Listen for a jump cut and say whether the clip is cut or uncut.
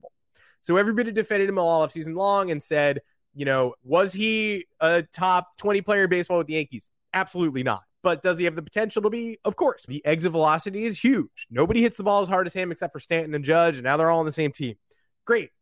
cut